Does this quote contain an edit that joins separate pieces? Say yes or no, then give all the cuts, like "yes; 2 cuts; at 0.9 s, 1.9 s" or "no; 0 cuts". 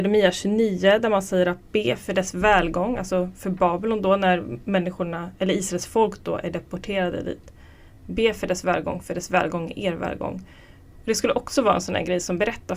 no; 0 cuts